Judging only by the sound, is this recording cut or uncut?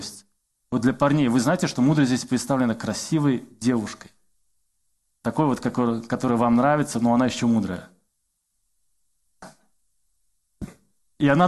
uncut